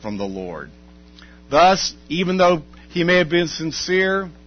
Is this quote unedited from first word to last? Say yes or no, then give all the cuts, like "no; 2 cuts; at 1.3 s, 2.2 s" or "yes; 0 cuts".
yes; 0 cuts